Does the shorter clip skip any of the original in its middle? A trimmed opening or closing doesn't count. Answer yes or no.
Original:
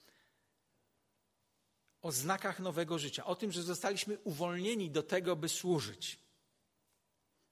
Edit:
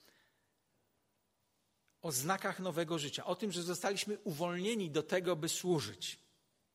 no